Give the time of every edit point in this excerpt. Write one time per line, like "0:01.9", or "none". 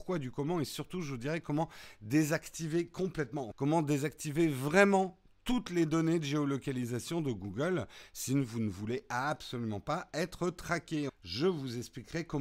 0:03.5
0:11.1

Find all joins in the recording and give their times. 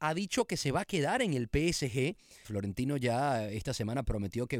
0:02.4

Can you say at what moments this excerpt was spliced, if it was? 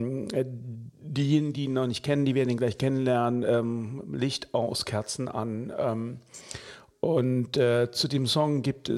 none

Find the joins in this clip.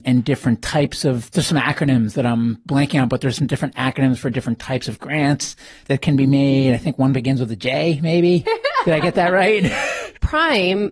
none

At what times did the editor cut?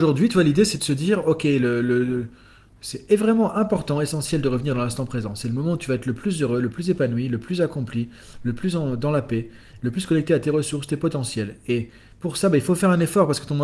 none

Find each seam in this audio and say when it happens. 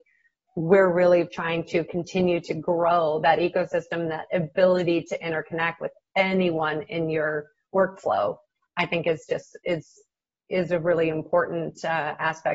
none

